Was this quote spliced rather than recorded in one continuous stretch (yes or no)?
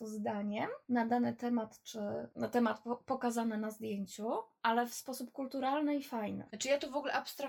no